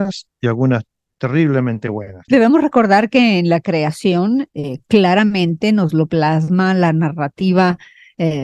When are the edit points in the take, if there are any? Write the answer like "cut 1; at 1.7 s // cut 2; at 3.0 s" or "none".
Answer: cut 1; at 2.3 s